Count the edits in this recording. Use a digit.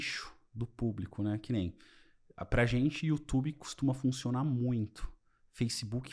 0